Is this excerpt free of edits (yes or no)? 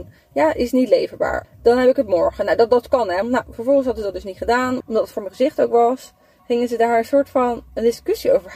no